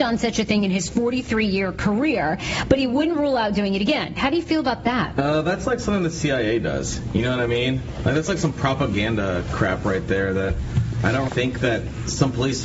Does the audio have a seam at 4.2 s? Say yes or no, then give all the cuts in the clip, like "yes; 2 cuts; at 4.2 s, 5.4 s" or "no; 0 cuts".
yes; 2 cuts; at 4.2 s, 11.3 s